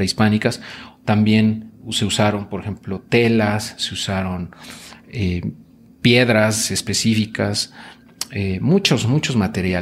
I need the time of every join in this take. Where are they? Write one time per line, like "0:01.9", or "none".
none